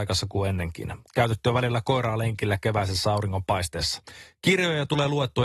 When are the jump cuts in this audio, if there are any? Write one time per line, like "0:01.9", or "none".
0:01.1
0:04.3